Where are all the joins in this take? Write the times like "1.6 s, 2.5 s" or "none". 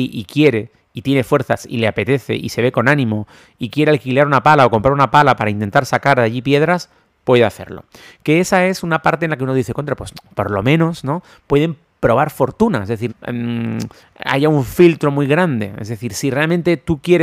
13.1 s